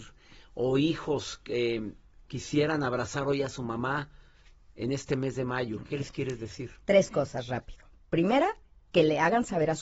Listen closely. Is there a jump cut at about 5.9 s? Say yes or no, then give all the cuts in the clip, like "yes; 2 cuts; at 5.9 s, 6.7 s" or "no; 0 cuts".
no; 0 cuts